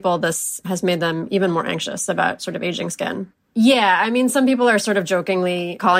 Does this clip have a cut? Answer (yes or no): yes